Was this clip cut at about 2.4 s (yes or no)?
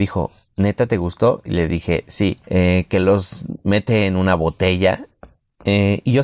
yes